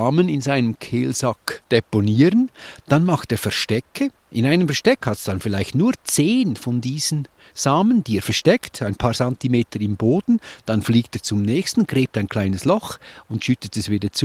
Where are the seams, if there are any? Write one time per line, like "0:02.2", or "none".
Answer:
none

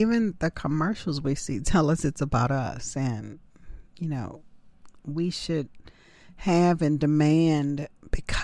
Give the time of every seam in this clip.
none

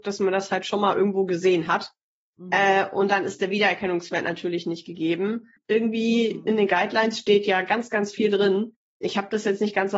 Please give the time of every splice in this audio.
0:05.7

